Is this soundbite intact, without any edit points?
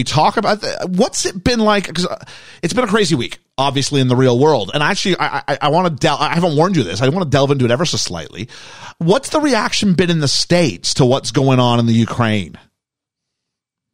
yes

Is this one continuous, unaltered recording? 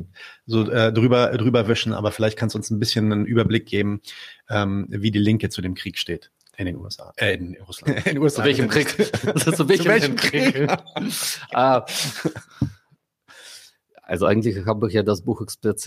no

